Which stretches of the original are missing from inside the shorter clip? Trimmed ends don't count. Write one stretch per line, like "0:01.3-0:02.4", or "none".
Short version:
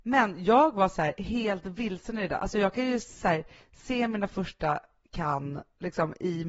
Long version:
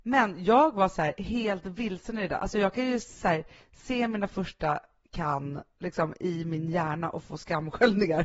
none